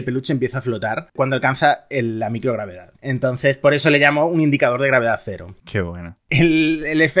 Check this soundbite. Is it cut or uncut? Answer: uncut